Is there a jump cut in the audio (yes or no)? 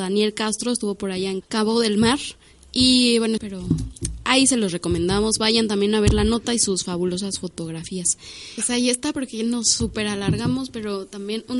yes